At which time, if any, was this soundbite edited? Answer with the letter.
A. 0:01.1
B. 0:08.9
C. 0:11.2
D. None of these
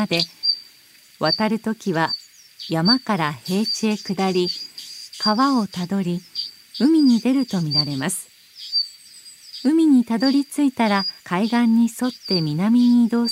C